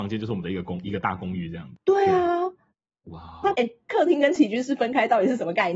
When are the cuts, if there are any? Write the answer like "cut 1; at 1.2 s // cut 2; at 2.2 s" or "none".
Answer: cut 1; at 3.5 s